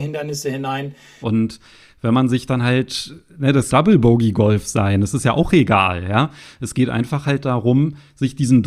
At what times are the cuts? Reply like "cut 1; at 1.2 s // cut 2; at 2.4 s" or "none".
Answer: cut 1; at 1.2 s // cut 2; at 3.7 s